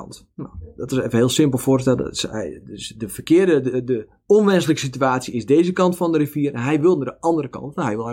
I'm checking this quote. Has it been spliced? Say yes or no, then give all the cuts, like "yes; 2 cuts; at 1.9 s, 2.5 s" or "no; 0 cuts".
no; 0 cuts